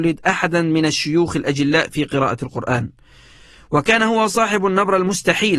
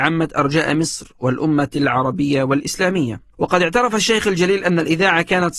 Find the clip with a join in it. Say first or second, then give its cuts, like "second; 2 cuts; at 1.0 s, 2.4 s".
second; 1 cut; at 3.3 s